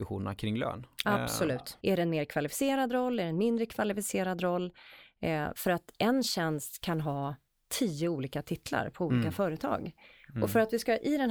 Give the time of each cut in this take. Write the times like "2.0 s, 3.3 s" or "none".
1.8 s